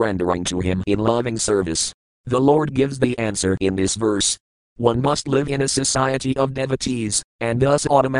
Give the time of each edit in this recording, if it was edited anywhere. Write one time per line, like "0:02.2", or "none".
0:02.0